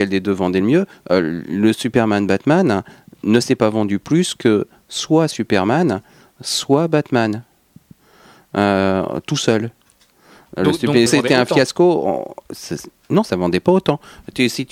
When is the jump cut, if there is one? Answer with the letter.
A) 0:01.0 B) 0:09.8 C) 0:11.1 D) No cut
C